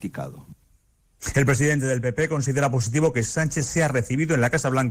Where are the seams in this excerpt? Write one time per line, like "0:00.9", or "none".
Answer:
none